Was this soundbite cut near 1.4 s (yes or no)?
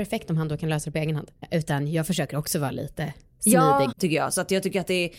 yes